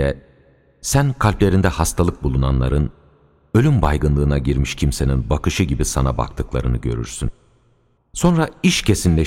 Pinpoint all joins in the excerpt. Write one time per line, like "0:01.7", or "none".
0:08.0